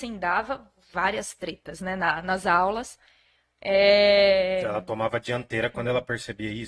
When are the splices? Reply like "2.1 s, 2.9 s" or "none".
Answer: none